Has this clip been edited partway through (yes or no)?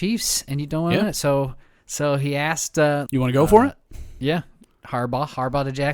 yes